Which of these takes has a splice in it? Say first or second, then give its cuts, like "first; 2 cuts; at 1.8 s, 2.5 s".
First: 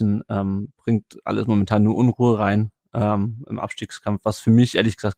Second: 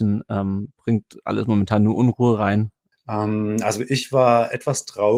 second; 1 cut; at 2.9 s